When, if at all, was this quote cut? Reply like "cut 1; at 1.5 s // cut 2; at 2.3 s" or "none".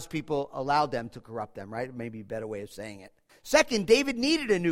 cut 1; at 3.3 s